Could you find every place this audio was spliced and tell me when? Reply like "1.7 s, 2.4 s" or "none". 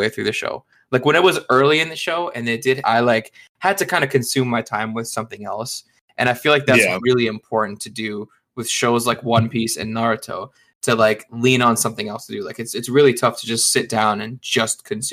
2.8 s